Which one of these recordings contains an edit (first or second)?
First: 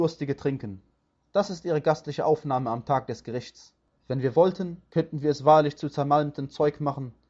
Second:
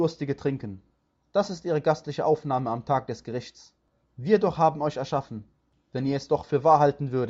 first